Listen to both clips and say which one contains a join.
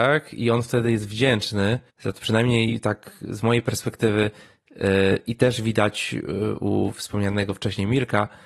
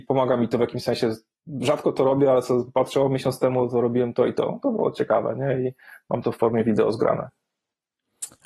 first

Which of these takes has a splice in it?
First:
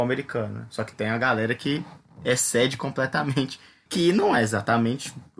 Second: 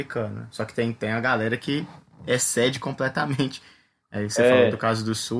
first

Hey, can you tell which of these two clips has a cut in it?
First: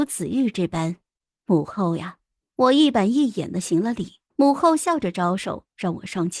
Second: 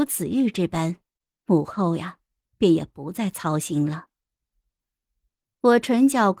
first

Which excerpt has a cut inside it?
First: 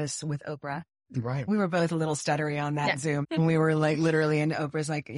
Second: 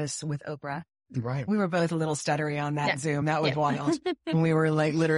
first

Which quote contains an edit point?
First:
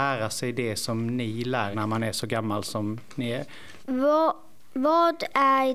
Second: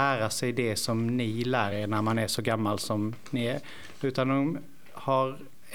first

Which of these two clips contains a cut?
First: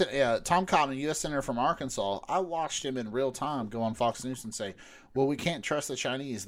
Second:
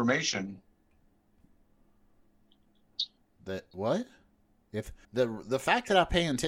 second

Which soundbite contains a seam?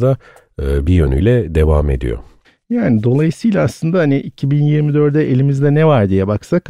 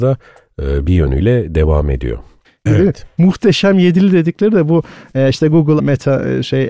second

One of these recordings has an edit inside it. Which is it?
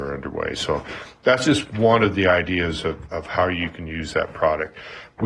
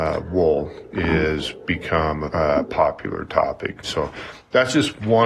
second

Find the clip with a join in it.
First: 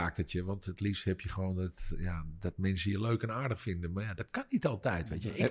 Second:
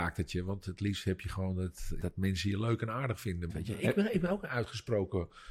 second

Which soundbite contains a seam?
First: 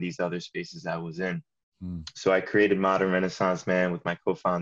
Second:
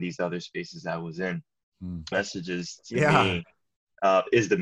second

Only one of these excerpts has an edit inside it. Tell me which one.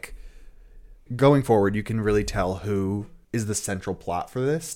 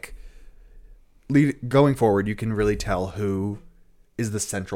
first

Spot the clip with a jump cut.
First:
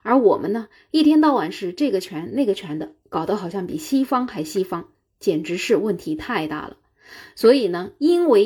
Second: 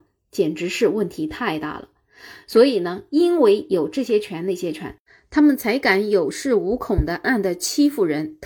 second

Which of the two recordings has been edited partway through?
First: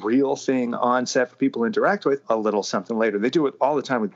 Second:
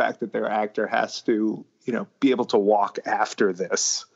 first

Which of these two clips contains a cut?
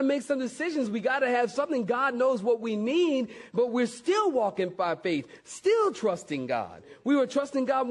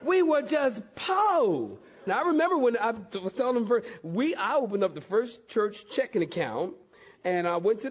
second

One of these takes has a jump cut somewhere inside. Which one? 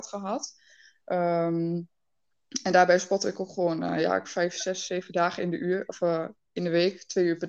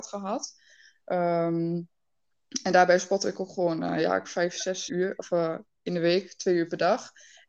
second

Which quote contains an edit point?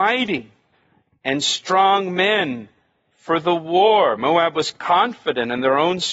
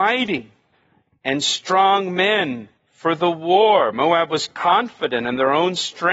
second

